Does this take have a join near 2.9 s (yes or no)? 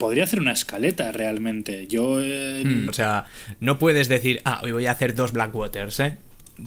yes